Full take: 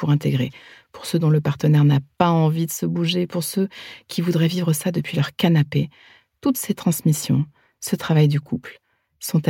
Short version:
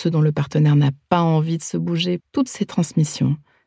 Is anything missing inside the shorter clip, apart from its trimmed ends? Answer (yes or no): yes